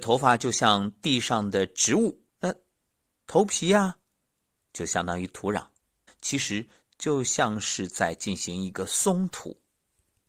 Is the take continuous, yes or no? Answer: no